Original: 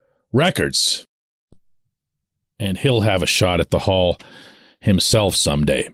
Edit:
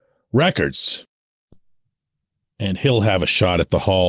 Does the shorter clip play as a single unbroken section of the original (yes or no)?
yes